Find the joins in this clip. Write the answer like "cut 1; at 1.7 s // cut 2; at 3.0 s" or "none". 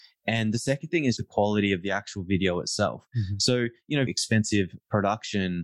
cut 1; at 1.2 s // cut 2; at 4.1 s